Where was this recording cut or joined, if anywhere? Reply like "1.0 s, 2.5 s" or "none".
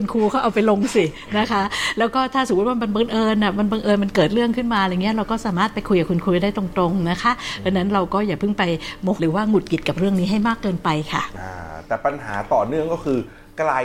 9.2 s